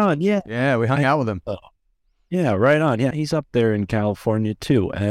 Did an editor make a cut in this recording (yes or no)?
yes